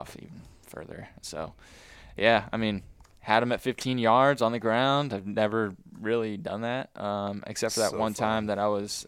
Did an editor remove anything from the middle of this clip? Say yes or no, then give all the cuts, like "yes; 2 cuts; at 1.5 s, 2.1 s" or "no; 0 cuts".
no; 0 cuts